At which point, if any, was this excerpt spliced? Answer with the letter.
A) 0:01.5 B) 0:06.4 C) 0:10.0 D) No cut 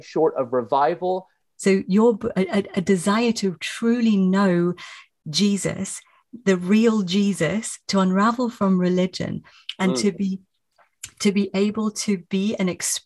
A